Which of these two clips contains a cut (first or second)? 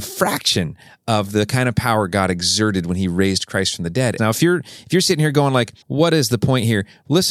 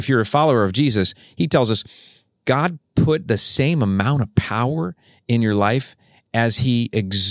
first